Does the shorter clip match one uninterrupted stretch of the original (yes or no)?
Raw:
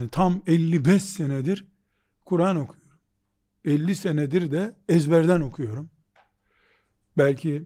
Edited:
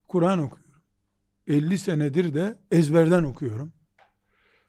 yes